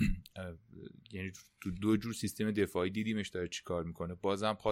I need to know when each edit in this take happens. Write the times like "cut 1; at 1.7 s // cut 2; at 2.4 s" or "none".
none